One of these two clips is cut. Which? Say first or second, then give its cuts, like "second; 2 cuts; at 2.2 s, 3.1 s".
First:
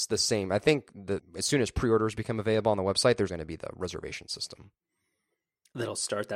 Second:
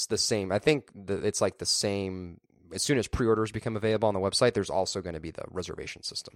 first; 2 cuts; at 1.2 s, 3.3 s